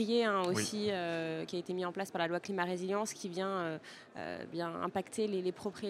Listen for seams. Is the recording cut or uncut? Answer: uncut